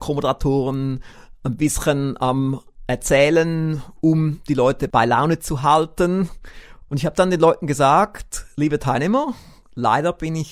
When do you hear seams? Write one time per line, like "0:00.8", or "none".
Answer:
0:06.9